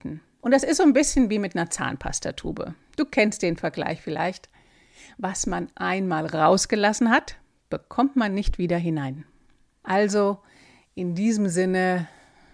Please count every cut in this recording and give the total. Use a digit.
0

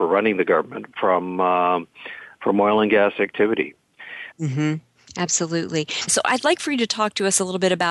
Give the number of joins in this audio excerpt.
2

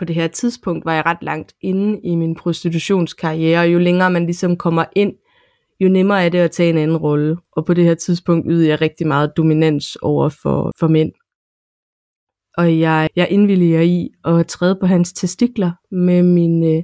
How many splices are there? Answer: 2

